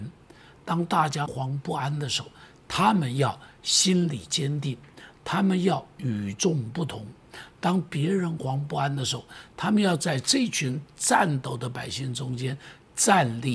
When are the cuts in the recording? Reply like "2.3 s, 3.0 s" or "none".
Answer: 1.3 s, 8.4 s